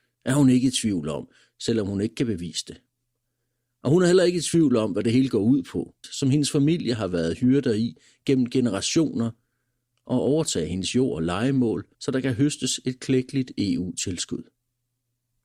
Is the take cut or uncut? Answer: cut